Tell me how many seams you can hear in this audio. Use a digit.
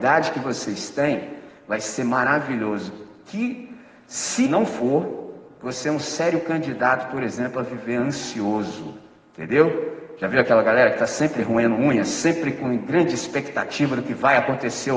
1